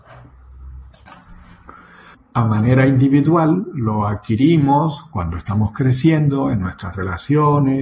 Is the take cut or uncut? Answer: cut